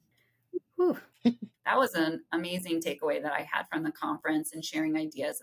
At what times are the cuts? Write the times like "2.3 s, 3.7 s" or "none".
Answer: 1.5 s